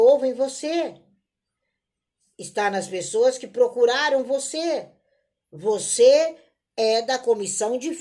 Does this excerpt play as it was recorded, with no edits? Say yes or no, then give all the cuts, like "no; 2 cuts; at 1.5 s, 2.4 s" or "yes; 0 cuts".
yes; 0 cuts